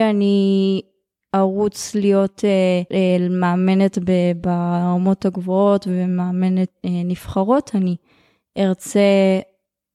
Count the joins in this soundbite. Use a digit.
1